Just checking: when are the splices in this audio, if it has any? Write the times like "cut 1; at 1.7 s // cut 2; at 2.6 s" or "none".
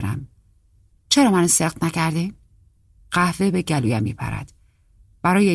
cut 1; at 0.9 s